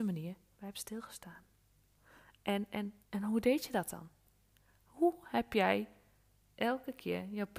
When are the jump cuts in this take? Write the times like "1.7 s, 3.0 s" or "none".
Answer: 3.0 s